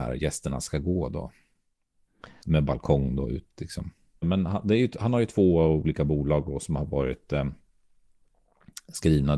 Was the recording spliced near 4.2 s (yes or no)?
yes